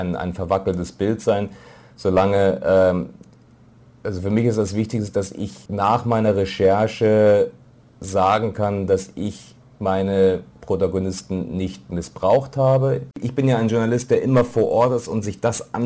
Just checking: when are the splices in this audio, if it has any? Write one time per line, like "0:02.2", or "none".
0:05.7
0:13.1